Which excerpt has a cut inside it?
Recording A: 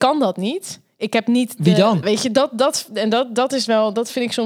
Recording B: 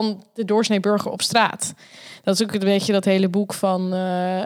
A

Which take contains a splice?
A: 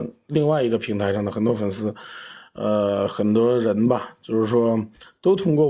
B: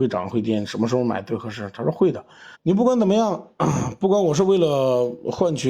B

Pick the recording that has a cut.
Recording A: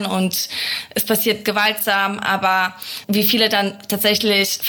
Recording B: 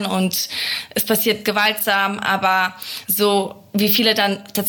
A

